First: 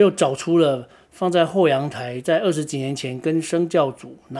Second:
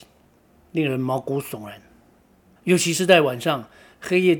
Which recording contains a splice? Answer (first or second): second